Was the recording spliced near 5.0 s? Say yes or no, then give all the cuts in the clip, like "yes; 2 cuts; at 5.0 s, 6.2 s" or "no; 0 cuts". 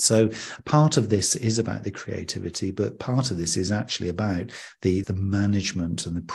yes; 1 cut; at 5.0 s